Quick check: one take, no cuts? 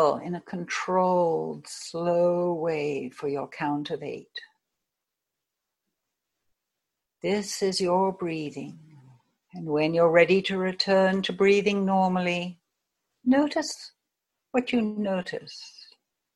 yes; 0 cuts

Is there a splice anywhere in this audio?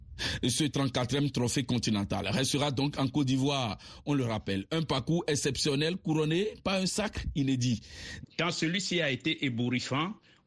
yes; 1 cut; at 8.2 s

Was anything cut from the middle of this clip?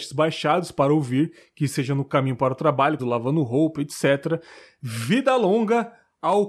yes; 1 cut; at 3.0 s

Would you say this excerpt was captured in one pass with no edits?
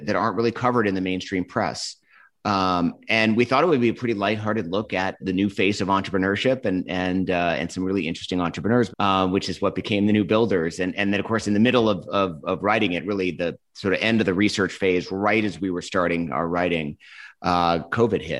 no; 2 cuts; at 5.2 s, 8.9 s

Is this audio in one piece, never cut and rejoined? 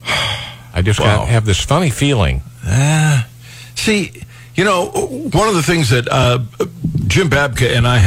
yes; 0 cuts

